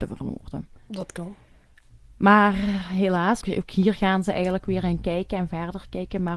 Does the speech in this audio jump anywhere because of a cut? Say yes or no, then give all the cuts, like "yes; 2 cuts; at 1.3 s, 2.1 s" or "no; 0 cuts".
yes; 1 cut; at 3.4 s